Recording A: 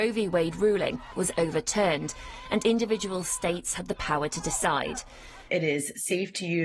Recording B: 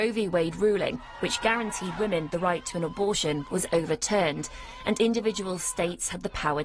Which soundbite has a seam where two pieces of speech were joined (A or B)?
A